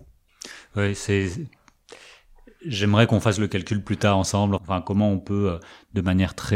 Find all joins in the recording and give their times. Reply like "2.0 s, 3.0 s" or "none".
4.6 s